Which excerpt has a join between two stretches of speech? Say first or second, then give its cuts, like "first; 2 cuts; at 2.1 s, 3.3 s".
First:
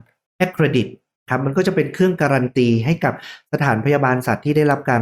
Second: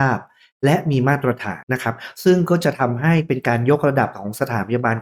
second; 1 cut; at 1.6 s